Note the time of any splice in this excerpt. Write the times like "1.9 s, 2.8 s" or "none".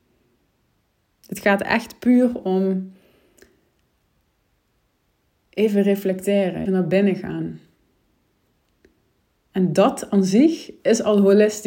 6.7 s